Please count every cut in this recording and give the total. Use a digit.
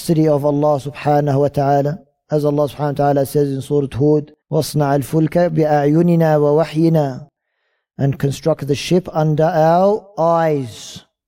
1